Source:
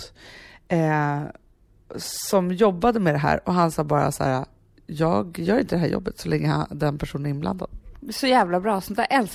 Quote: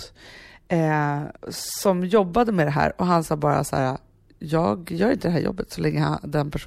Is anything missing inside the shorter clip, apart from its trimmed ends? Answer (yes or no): yes